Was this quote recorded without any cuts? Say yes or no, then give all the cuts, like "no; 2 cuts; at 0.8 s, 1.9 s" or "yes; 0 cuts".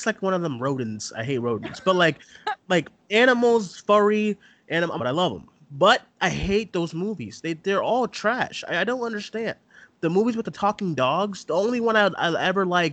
no; 1 cut; at 5.0 s